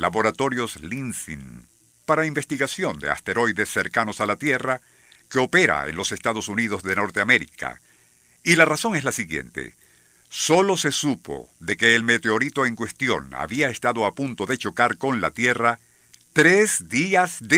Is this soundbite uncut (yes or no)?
yes